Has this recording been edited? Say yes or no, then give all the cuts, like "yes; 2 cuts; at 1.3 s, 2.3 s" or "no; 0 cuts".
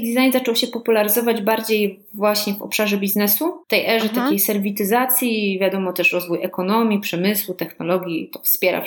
yes; 1 cut; at 3.6 s